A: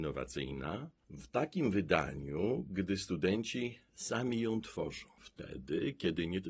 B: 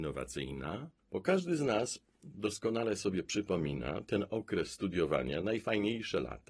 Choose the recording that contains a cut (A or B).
B